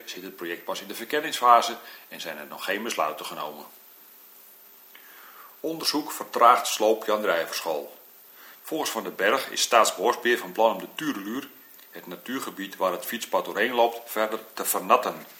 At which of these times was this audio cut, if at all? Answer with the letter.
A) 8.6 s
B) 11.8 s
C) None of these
A